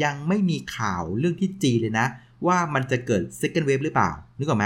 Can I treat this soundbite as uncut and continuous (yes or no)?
yes